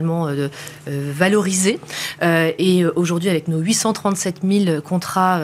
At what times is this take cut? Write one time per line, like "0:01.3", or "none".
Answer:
none